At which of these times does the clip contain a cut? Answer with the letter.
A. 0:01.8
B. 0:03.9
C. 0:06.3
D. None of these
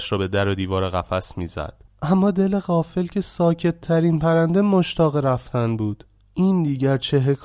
A